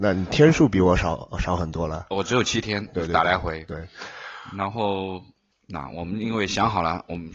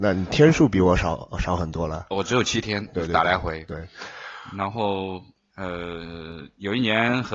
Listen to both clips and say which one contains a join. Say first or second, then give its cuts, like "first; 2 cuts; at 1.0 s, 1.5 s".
first; 1 cut; at 5.5 s